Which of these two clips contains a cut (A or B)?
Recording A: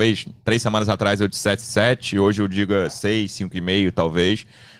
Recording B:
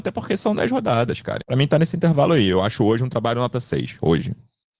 B